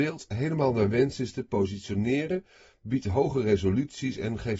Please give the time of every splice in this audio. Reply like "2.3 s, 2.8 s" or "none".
none